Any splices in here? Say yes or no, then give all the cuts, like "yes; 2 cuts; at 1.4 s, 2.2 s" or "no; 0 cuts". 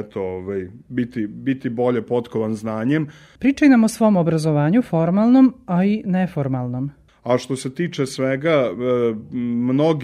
yes; 2 cuts; at 3.4 s, 7.1 s